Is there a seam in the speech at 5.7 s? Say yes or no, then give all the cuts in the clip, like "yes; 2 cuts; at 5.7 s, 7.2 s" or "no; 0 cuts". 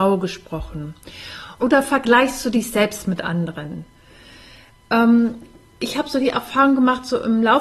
no; 1 cut; at 1.6 s